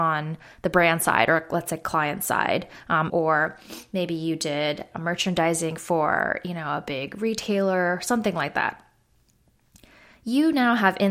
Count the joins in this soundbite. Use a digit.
1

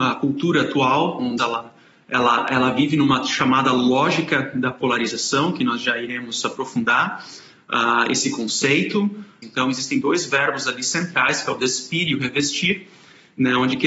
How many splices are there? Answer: 2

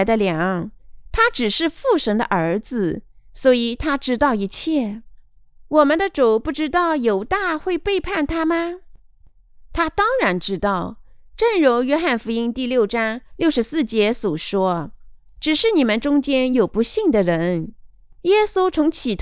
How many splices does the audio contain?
1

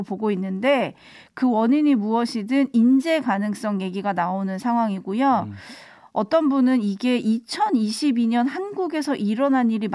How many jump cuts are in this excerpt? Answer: 0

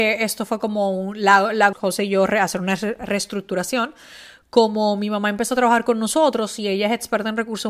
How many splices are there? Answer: 1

